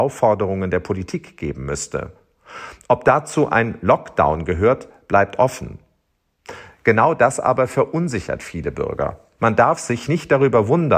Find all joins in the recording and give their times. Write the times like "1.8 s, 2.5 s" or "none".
9.4 s